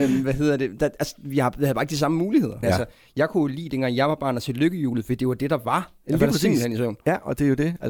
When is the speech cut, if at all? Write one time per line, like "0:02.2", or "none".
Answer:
0:02.6
0:06.0